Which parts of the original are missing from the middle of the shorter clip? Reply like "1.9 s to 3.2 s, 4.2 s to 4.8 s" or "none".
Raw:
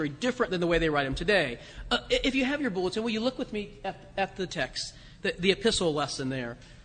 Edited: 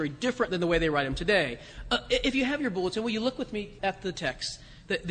3.8 s to 4.1 s